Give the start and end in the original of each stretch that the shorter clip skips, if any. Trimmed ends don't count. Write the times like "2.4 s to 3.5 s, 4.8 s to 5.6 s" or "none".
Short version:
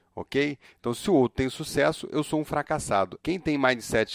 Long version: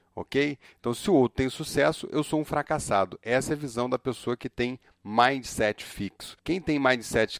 3.2 s to 6.4 s